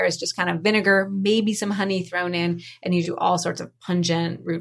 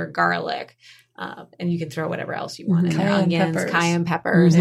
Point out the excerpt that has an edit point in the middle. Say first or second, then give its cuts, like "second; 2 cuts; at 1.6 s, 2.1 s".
first; 1 cut; at 3.0 s